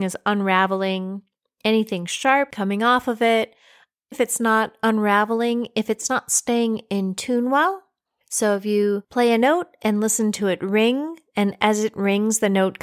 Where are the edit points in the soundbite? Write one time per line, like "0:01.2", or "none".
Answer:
0:04.1